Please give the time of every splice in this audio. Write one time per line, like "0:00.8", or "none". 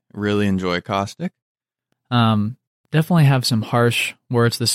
0:01.9

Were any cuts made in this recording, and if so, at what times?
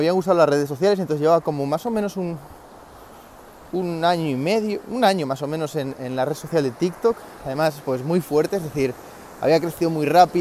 none

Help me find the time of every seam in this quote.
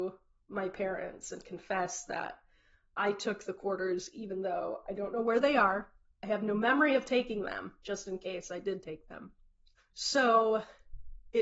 0:07.8
0:09.8

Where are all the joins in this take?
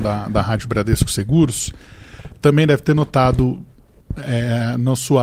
none

